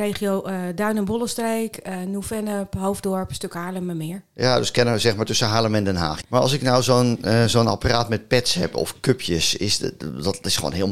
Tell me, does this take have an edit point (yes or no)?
yes